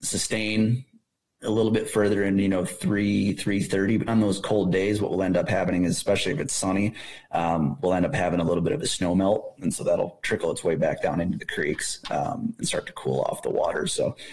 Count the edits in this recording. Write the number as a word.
one